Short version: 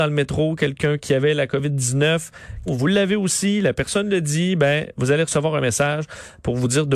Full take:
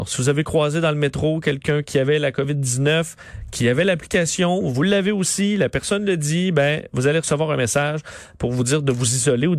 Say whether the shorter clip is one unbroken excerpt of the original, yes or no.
no